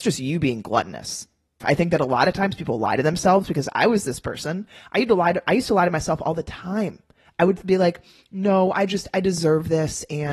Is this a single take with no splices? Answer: no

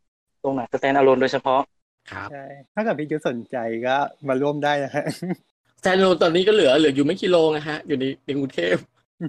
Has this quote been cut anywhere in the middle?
yes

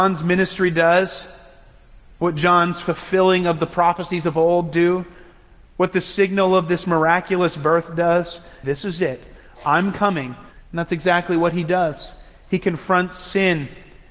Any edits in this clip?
yes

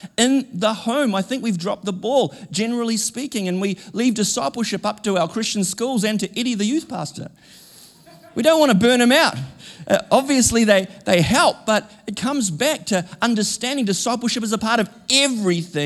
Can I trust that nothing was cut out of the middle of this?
yes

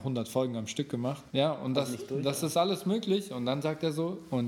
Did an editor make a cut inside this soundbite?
yes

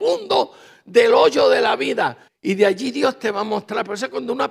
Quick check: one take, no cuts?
no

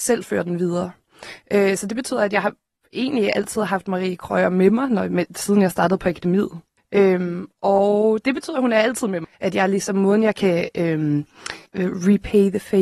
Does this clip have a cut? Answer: yes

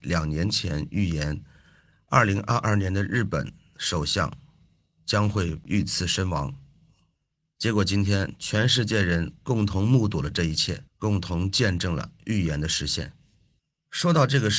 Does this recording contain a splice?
yes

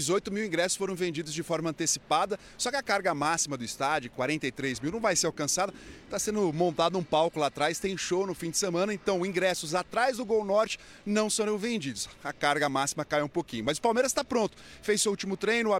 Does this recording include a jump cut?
no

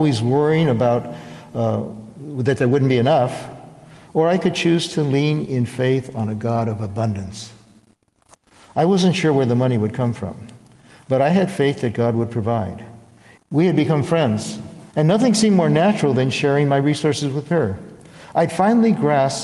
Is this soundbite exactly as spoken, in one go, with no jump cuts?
no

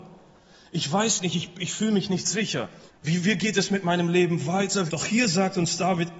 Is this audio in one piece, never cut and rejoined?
no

